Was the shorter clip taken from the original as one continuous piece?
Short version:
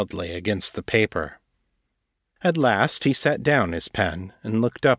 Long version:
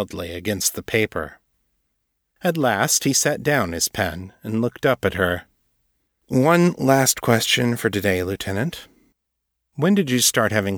yes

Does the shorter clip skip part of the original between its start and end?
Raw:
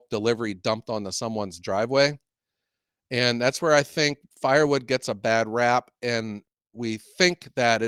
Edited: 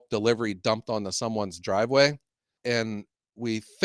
yes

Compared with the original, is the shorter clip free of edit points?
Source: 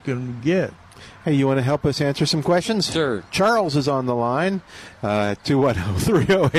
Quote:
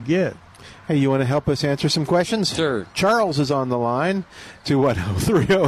no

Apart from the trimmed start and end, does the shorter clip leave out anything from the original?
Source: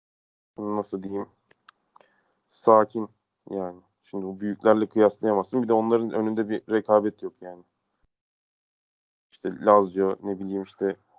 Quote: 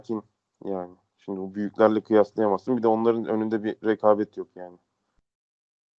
no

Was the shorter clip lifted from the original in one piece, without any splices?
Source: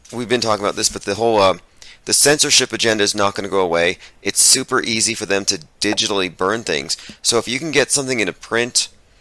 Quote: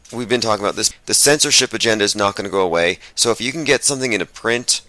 no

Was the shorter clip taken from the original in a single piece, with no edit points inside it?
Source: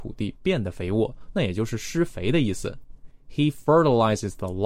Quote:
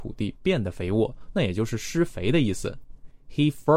yes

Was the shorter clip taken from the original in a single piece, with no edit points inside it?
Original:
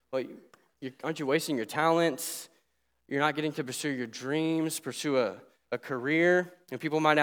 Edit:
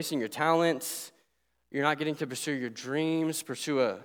yes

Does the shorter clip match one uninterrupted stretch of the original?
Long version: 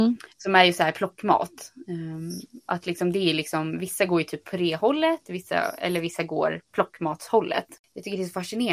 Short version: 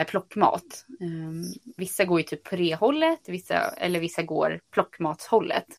no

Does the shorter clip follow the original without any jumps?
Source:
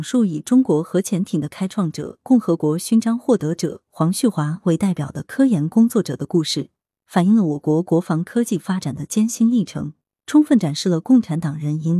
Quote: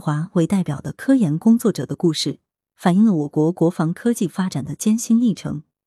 yes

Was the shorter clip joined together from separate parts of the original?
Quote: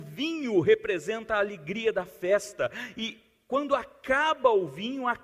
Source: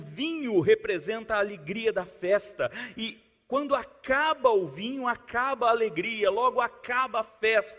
no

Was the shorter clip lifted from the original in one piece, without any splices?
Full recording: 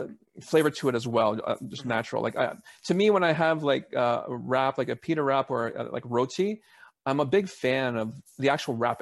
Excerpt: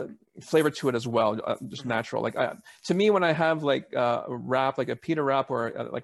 yes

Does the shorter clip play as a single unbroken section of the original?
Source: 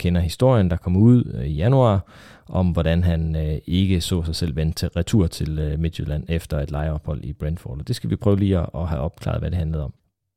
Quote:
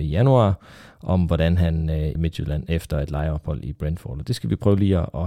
no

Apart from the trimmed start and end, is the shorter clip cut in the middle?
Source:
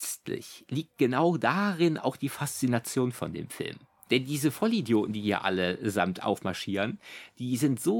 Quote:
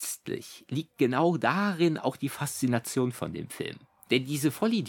no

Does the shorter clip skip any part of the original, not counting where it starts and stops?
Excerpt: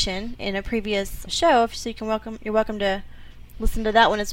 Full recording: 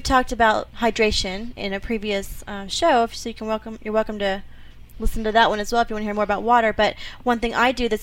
yes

